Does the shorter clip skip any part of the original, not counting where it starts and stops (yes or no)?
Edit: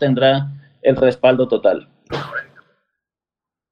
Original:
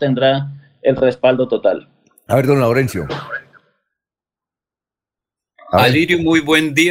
yes